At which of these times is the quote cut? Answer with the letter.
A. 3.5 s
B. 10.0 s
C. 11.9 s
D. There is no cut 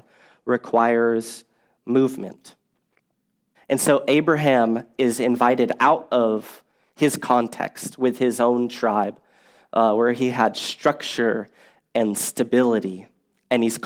A